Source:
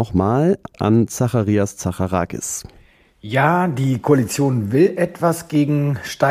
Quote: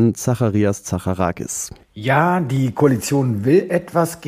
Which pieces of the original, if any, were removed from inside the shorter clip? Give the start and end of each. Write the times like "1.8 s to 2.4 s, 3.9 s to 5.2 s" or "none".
2.8 s to 3.1 s